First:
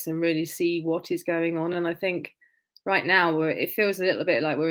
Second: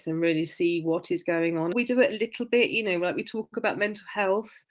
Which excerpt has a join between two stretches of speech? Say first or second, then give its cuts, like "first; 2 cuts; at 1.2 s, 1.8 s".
second; 1 cut; at 1.7 s